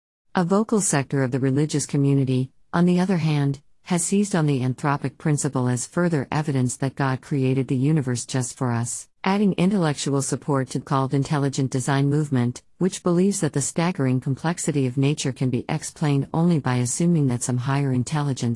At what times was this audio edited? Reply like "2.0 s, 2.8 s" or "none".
9.2 s, 10.8 s